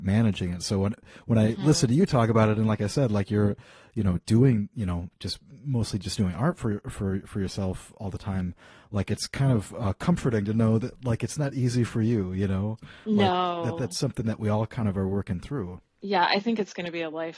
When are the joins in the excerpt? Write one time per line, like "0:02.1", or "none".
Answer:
none